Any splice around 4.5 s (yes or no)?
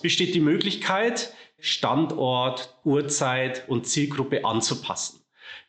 no